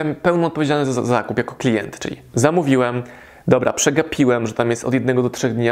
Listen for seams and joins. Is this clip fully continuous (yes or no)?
yes